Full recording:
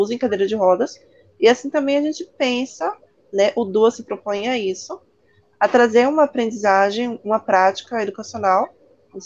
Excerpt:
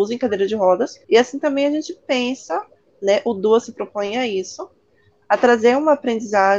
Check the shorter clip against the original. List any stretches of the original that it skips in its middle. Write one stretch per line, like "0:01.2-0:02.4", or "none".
0:01.0-0:01.4